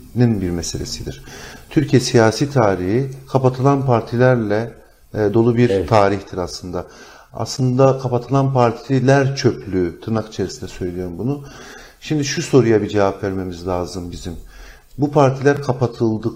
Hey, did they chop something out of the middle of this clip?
no; 0 cuts

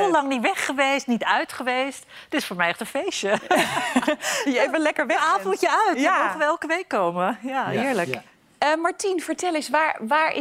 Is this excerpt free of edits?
yes; 0 cuts

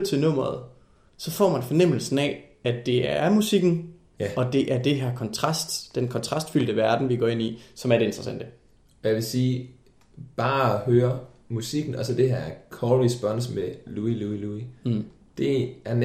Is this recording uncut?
yes; 0 cuts

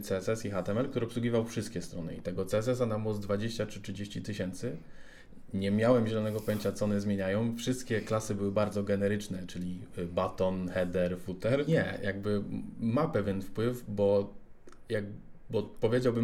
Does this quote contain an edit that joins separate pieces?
yes; 1 cut; at 11.7 s

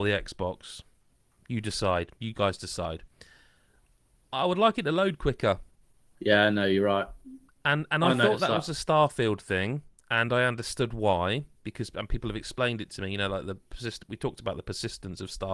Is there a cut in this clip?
no; 0 cuts

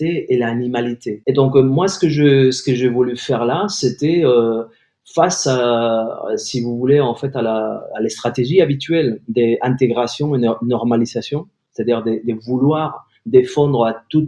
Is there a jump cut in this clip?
yes; 1 cut; at 1.2 s

